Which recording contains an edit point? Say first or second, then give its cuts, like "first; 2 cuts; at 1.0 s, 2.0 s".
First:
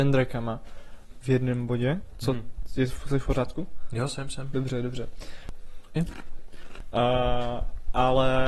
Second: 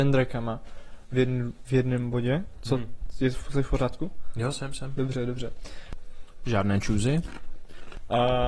first; 2 cuts; at 1.1 s, 6.0 s